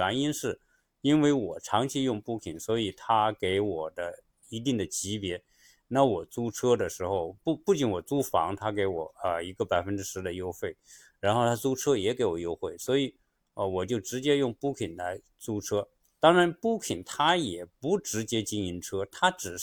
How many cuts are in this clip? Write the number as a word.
zero